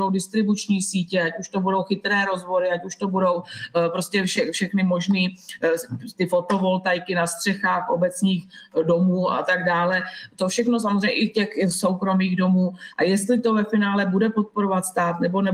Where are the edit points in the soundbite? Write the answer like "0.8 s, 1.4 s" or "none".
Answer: 12.9 s

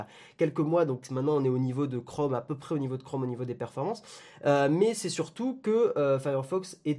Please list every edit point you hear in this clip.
none

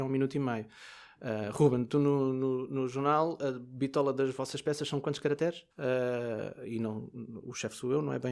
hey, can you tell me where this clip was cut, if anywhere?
5.7 s

